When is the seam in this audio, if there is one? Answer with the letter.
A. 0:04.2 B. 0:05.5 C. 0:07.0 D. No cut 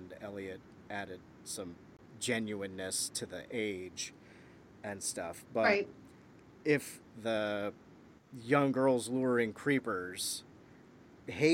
C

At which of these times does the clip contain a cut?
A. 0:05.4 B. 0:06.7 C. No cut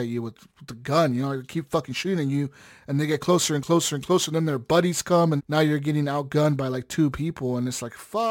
A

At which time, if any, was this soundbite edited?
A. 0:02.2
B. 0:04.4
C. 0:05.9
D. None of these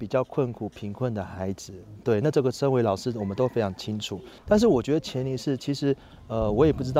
B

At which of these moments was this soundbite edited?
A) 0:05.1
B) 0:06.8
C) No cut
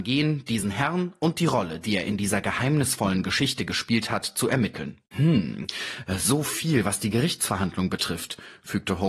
A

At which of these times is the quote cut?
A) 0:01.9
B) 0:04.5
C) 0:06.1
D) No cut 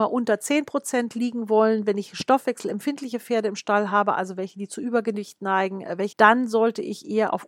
C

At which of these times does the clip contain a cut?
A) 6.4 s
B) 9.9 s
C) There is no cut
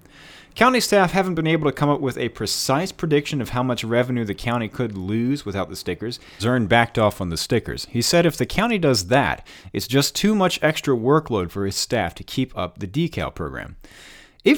A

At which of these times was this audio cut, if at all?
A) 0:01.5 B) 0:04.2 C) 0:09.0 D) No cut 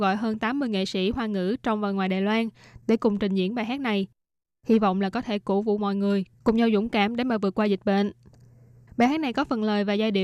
D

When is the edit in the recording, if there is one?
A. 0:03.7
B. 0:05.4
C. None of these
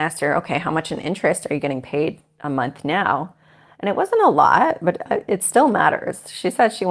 C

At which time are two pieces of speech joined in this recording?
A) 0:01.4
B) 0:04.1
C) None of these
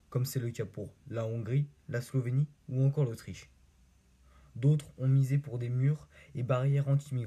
C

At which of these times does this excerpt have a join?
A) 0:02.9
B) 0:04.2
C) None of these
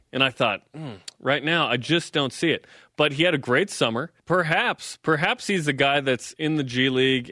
B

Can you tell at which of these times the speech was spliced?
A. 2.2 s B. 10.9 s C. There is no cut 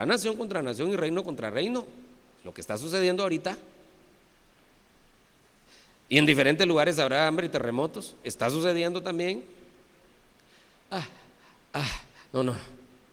B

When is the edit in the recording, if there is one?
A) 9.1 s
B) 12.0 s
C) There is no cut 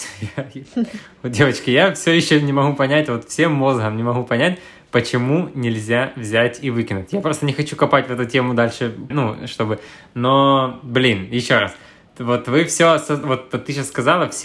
A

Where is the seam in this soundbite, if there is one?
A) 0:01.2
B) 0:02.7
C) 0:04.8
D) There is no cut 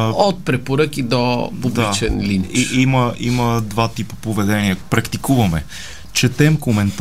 C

